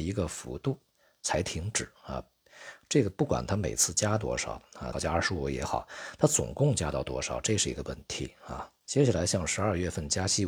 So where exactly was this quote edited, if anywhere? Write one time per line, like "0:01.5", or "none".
0:04.9
0:08.8